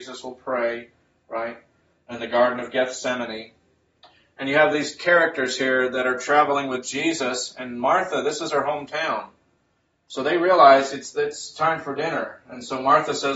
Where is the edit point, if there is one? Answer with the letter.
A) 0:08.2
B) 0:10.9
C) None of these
C